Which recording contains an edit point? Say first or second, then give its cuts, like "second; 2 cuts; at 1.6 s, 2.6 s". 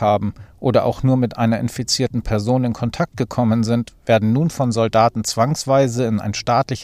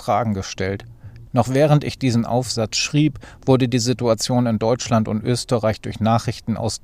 second; 1 cut; at 1.3 s